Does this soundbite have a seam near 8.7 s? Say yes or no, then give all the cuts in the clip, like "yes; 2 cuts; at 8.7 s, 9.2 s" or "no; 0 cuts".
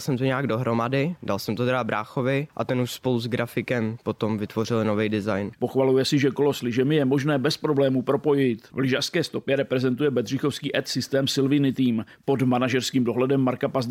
yes; 2 cuts; at 5.6 s, 8.7 s